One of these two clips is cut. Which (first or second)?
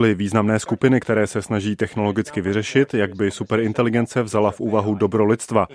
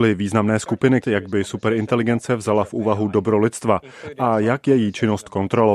second